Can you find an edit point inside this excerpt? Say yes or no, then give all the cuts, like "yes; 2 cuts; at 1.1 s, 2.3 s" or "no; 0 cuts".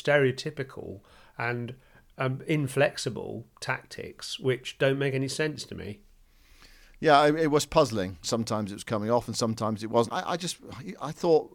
yes; 2 cuts; at 8.2 s, 10.1 s